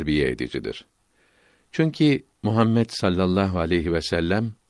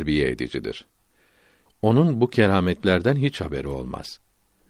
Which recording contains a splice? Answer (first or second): second